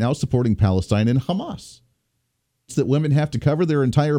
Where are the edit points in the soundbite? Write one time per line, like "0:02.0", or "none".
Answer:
0:02.7